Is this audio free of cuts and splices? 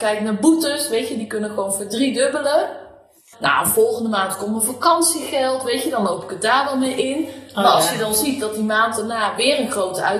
no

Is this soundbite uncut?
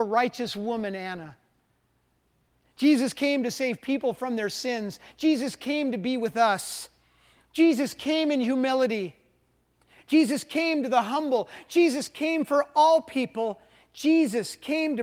yes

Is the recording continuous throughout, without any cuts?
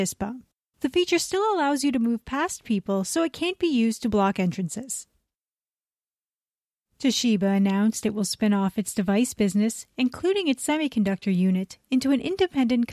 yes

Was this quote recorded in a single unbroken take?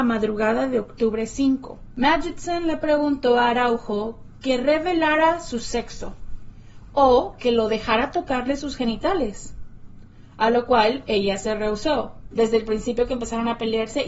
no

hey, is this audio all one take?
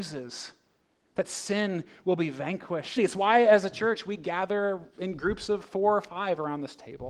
no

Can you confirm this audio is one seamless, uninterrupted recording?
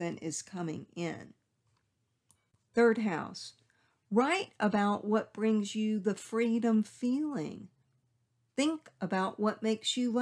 no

